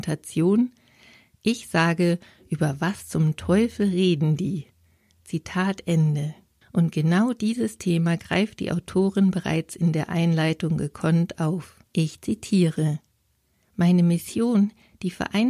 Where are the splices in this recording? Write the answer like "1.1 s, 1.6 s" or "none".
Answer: 6.6 s, 11.9 s